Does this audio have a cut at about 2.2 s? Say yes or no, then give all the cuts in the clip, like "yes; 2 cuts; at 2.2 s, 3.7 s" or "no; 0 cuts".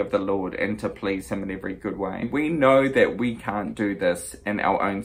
yes; 1 cut; at 2.2 s